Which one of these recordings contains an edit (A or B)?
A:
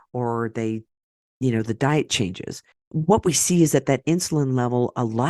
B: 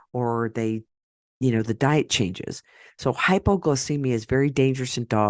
A